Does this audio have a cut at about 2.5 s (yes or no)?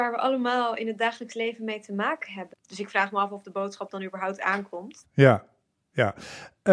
yes